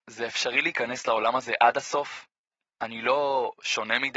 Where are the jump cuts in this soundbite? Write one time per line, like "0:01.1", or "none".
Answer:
none